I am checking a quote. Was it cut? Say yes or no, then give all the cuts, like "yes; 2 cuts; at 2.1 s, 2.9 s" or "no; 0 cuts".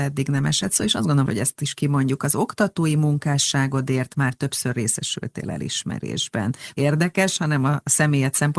yes; 2 cuts; at 1.3 s, 6.7 s